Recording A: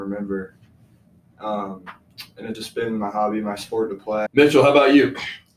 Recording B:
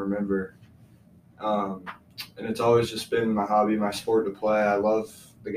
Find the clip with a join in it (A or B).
A